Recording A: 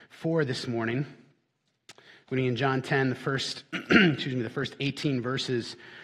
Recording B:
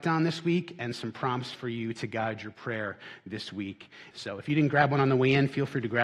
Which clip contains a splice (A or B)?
B